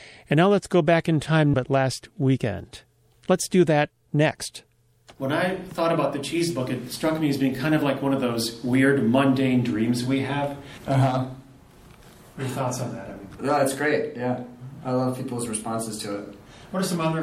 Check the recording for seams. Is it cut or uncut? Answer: cut